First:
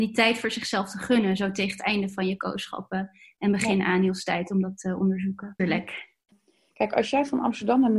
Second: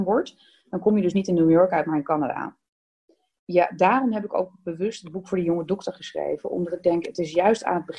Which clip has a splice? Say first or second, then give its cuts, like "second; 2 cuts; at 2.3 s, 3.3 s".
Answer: first; 1 cut; at 5.6 s